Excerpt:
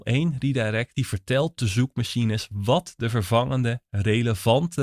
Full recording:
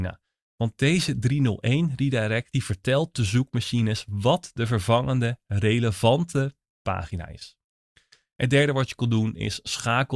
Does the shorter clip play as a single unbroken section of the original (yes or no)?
yes